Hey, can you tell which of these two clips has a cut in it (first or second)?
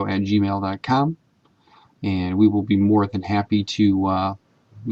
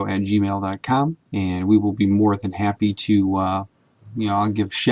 second